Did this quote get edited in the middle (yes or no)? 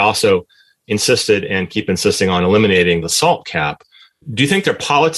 no